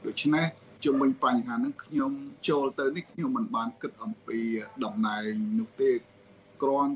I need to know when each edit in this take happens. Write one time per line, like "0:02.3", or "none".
0:02.4